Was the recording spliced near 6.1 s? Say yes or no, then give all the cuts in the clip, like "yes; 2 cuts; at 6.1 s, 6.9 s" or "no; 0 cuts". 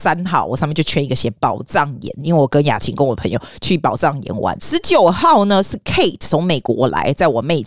no; 1 cut; at 4.6 s